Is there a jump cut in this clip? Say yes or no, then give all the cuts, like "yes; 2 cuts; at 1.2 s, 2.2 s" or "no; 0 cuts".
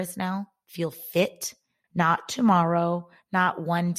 yes; 1 cut; at 1.8 s